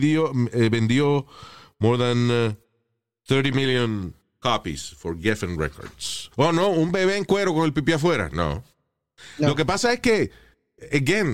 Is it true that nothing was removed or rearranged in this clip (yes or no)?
no